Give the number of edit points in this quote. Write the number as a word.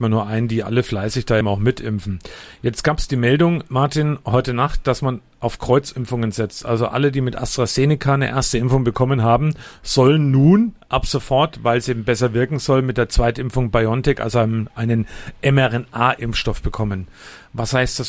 one